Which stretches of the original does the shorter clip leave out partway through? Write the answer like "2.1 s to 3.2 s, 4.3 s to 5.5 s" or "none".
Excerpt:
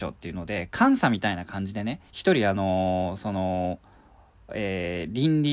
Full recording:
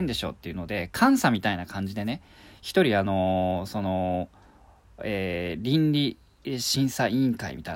2.3 s to 2.6 s